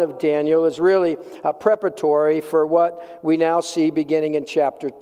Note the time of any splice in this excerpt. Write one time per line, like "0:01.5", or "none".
none